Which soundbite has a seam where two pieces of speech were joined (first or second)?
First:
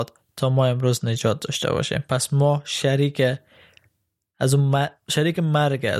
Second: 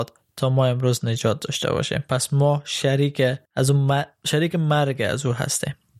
second